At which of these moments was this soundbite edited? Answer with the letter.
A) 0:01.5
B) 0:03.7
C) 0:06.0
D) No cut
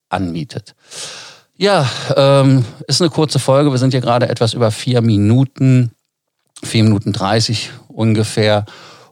D